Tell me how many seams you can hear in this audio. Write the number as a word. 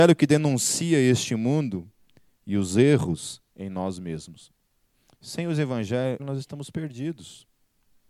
one